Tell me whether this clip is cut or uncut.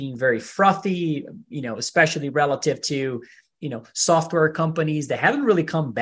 uncut